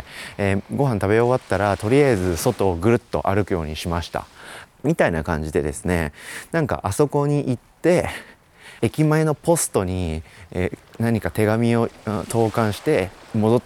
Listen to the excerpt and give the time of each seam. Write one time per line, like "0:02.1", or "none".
0:04.6
0:08.8